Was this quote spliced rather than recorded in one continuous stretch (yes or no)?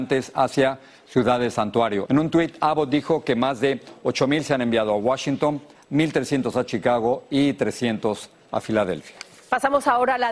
yes